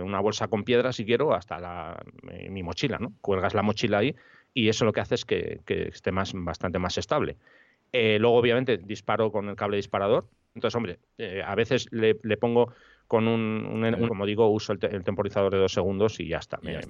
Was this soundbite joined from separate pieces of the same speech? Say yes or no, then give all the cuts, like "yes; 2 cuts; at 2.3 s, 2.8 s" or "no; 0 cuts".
yes; 2 cuts; at 10.6 s, 14.1 s